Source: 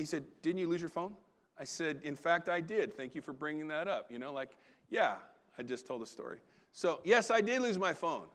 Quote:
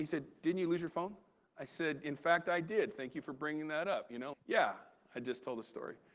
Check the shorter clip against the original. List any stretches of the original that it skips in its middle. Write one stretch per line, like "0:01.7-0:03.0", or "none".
0:04.3-0:04.8